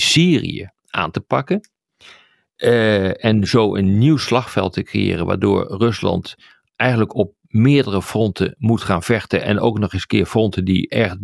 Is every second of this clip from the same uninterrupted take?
yes; 0 cuts

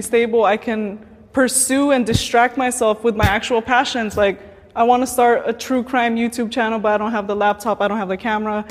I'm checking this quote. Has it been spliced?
no; 0 cuts

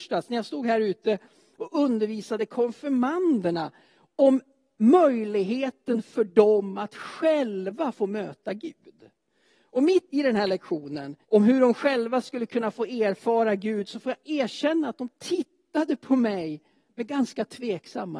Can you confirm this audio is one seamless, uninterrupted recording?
no; 2 cuts; at 10.1 s, 11.2 s

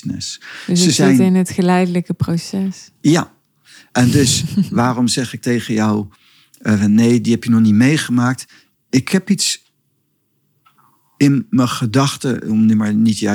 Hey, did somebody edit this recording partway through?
no; 0 cuts

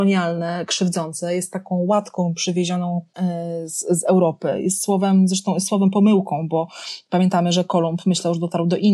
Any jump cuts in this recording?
no; 0 cuts

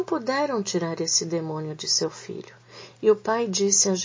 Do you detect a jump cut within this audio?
no; 0 cuts

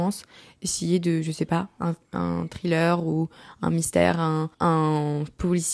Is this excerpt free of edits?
no; 1 cut; at 4.5 s

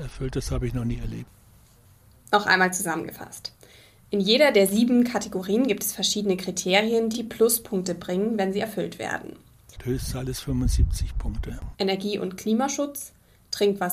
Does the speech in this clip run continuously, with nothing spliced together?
no; 3 cuts; at 7.1 s, 9.8 s, 11.7 s

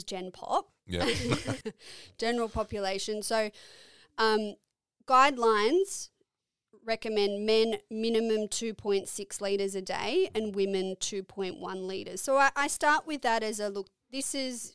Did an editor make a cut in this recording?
yes; 1 cut; at 1.6 s

